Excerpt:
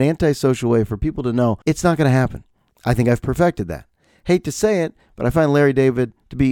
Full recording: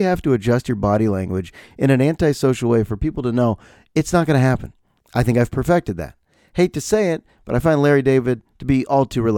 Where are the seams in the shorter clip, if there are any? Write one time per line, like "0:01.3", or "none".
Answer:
0:01.6